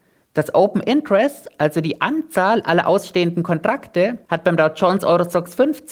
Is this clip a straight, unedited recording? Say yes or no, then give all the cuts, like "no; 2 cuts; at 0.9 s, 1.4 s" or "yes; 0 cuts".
yes; 0 cuts